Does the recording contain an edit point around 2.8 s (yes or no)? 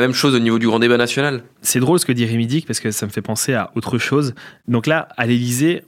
no